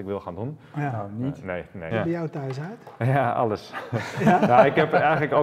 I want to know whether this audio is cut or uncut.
cut